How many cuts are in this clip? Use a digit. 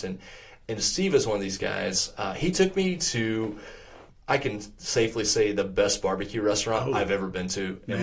1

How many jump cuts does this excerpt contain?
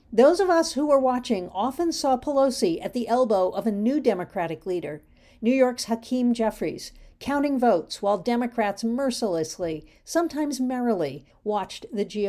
1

